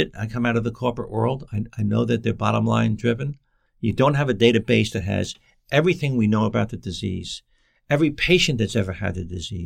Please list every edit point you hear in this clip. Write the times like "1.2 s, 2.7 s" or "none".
3.7 s